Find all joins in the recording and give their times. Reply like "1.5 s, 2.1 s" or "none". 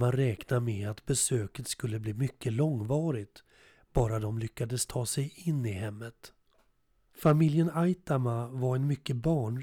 7.1 s